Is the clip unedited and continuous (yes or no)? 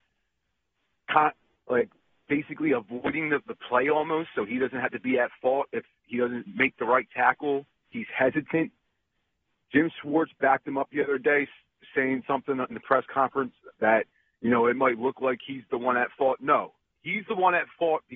yes